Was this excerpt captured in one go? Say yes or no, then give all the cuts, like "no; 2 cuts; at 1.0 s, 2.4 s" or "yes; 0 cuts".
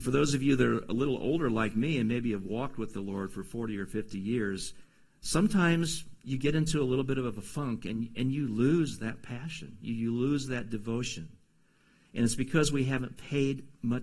yes; 0 cuts